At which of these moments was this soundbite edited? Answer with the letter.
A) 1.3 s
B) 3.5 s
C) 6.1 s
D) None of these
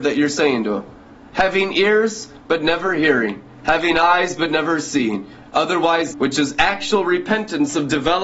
C